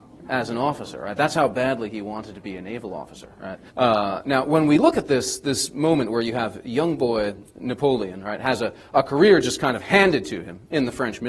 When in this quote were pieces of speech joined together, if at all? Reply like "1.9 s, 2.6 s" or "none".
3.7 s